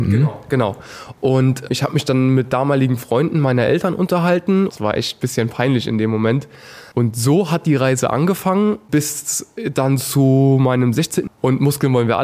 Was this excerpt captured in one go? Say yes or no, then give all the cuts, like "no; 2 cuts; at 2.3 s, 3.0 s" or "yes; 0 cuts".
no; 3 cuts; at 4.7 s, 6.9 s, 11.3 s